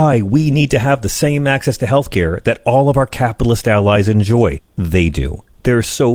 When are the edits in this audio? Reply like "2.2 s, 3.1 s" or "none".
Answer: 4.6 s